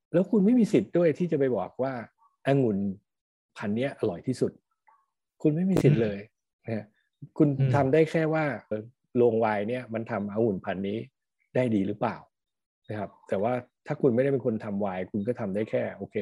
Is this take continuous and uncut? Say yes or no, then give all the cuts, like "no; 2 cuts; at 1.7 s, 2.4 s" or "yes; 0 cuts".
no; 1 cut; at 8.7 s